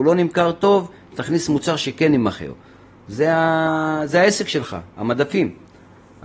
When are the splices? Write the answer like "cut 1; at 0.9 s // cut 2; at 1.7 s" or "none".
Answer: cut 1; at 1.1 s